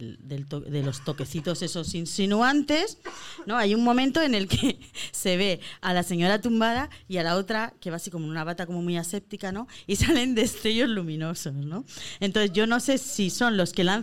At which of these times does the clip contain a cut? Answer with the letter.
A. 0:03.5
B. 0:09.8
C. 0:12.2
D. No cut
D